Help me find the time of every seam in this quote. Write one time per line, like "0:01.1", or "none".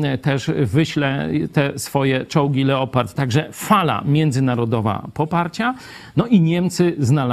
0:03.2